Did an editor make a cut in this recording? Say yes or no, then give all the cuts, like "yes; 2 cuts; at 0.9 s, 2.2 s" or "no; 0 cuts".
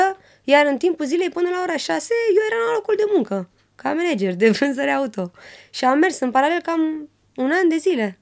no; 0 cuts